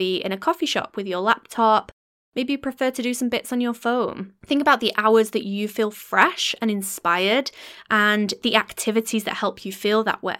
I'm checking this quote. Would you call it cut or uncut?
uncut